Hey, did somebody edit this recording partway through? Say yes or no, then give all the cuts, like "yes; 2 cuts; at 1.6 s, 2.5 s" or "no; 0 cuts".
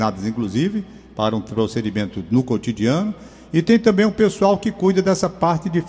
no; 0 cuts